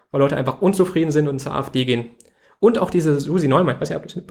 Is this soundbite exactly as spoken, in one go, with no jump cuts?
yes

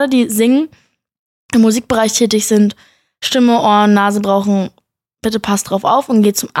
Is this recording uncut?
yes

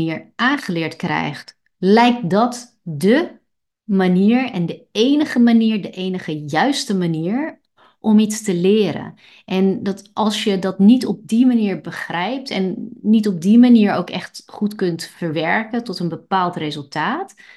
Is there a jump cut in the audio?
yes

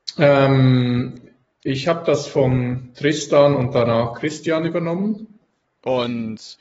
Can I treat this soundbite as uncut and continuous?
no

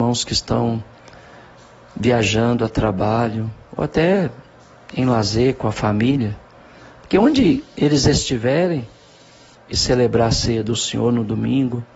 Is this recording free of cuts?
no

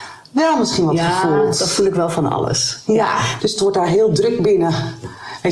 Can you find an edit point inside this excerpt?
yes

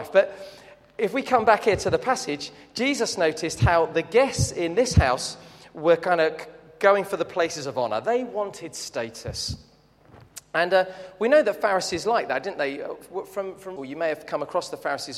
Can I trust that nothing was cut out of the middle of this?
no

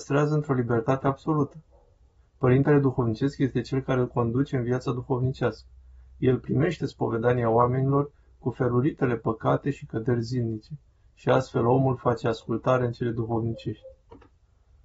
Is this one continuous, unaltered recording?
yes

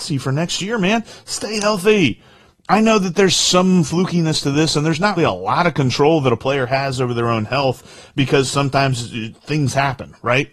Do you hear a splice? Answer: yes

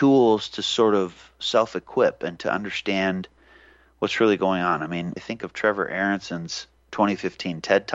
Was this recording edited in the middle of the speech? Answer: yes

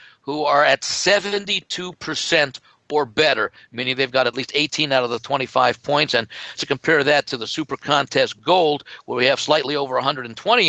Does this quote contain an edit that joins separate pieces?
yes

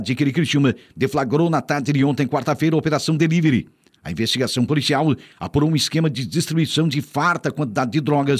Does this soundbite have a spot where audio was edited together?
no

